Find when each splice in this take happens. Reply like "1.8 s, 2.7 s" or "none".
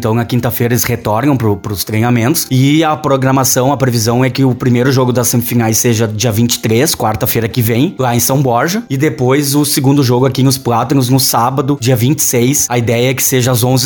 none